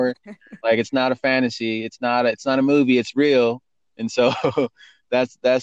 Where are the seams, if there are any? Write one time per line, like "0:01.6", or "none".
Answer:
none